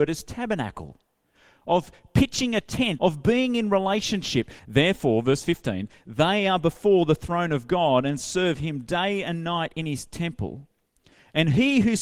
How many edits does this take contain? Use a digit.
2